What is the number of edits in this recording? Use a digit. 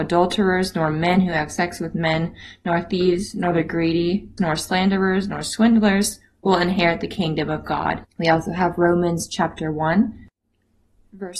2